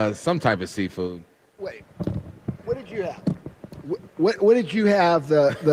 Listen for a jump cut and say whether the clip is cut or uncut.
cut